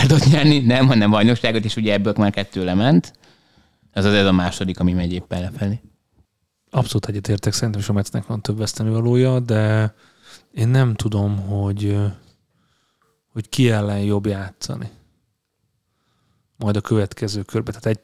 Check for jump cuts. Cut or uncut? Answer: uncut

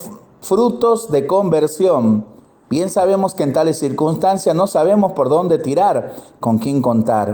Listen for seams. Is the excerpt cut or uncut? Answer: cut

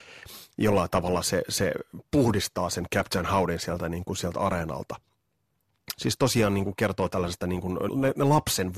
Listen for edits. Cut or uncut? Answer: cut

